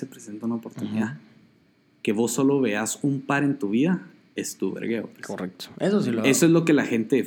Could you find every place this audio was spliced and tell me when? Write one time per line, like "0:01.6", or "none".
none